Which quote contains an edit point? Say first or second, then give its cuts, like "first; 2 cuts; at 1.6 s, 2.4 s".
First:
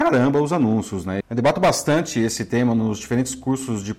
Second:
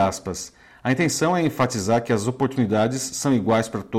first; 1 cut; at 1.2 s